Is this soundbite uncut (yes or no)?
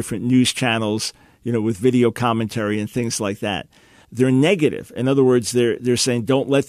no